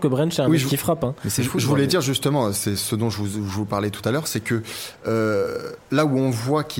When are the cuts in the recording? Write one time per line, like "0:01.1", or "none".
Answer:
0:05.8